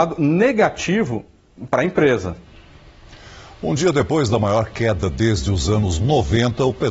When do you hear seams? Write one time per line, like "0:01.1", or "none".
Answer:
none